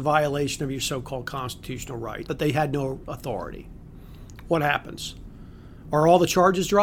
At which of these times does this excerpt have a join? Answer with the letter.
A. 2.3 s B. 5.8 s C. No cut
A